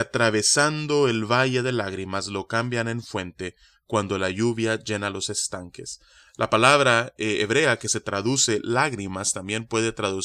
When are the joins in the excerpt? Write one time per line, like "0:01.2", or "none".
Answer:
none